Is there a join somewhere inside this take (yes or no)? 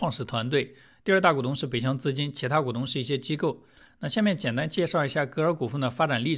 no